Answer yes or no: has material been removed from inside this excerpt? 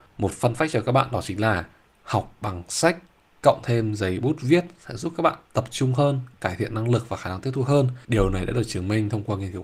yes